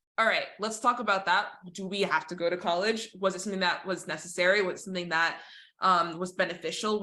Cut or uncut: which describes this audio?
uncut